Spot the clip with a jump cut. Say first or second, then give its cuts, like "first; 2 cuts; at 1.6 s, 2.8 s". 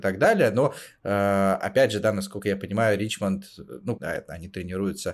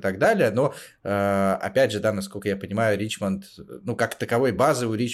first; 1 cut; at 4.0 s